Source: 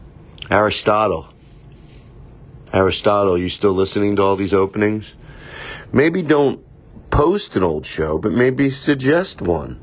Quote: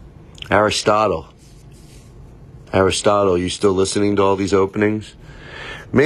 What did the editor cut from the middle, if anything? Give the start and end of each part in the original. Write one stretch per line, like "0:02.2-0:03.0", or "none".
none